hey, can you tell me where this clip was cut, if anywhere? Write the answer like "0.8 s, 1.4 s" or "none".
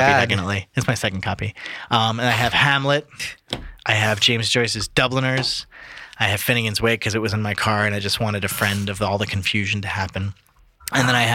none